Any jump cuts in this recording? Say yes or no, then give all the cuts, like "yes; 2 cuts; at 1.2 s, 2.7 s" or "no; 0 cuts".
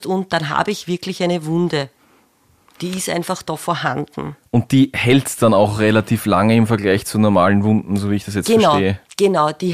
no; 0 cuts